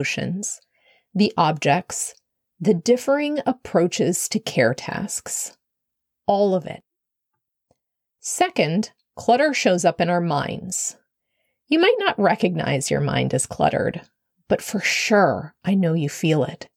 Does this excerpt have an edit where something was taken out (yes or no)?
no